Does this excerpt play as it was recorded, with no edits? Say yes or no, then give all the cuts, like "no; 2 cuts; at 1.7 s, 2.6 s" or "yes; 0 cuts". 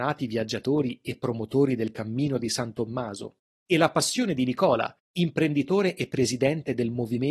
yes; 0 cuts